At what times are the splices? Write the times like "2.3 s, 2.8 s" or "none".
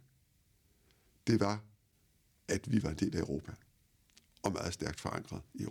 none